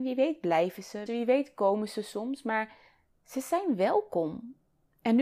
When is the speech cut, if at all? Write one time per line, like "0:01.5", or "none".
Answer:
0:01.1